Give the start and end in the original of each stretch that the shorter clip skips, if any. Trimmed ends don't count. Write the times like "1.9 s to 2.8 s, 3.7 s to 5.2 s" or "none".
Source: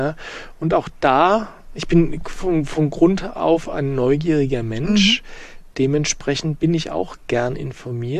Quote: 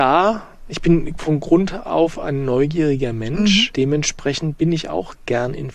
2.2 s to 2.7 s, 5.2 s to 5.7 s